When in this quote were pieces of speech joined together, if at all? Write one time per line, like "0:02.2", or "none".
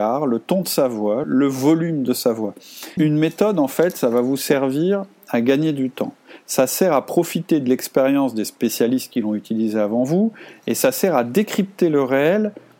0:01.2
0:03.0